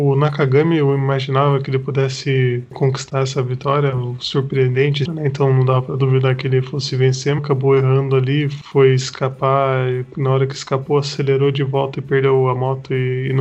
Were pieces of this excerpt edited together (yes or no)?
yes